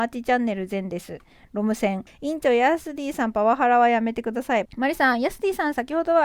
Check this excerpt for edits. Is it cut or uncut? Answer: cut